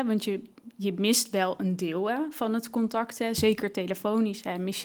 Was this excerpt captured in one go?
yes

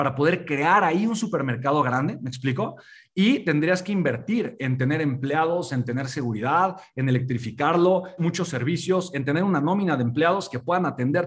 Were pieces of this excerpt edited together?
yes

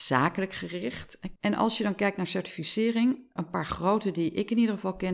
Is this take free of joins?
no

